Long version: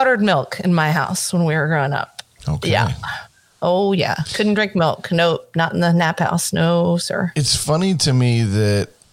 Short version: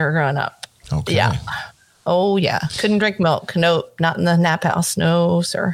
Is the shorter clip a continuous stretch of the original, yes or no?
yes